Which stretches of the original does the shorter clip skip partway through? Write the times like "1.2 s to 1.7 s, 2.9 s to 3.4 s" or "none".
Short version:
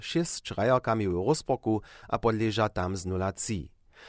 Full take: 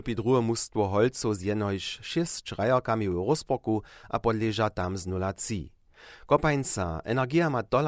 none